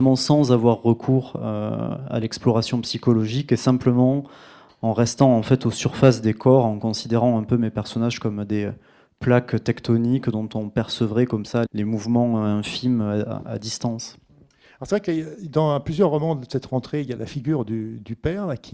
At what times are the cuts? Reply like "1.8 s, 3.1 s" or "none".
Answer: 11.7 s, 17.2 s

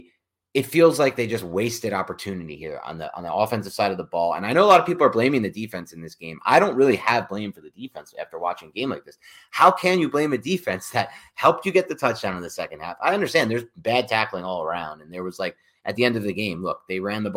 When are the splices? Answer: none

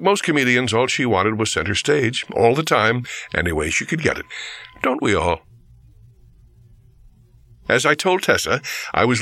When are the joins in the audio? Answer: none

